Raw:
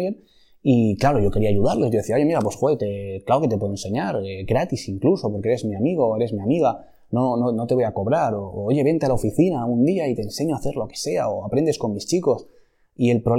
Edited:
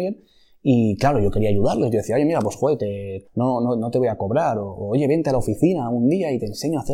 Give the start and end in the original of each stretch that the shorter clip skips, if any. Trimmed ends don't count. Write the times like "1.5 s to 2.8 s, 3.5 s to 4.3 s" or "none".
3.2 s to 7.0 s